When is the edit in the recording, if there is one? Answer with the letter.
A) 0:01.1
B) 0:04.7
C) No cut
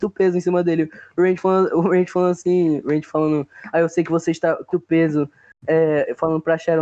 B